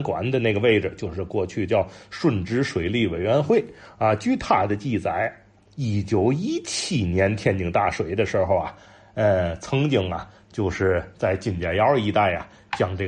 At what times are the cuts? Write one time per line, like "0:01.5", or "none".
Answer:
none